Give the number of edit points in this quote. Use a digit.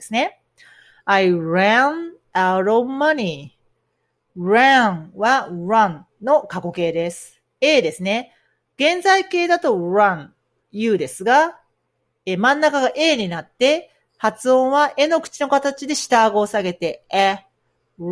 0